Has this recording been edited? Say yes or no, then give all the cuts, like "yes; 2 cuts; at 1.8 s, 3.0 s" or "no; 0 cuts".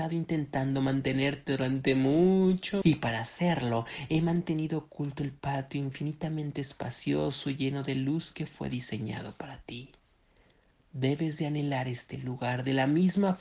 yes; 1 cut; at 2.8 s